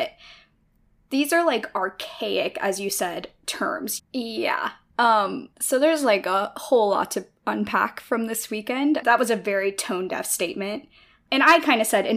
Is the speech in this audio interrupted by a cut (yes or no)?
yes